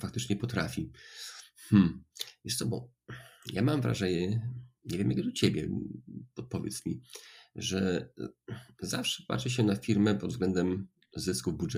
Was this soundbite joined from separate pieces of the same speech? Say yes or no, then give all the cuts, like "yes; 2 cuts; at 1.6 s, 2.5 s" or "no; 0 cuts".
no; 0 cuts